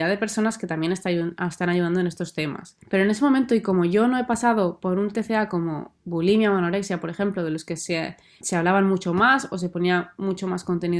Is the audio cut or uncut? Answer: cut